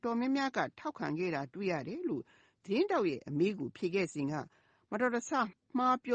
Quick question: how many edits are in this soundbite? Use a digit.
0